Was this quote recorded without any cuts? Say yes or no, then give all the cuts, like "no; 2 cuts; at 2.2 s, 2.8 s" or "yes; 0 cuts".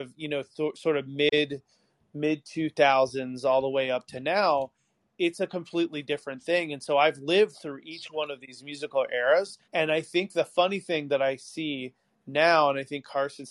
no; 1 cut; at 9.6 s